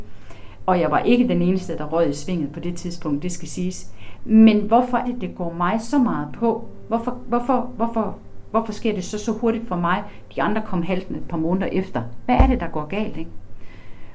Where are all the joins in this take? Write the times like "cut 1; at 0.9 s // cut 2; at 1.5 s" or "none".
cut 1; at 5.1 s